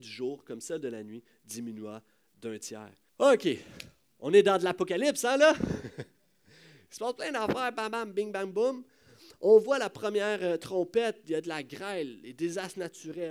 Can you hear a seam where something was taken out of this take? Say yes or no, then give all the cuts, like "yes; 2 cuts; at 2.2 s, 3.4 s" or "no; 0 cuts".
yes; 1 cut; at 3.1 s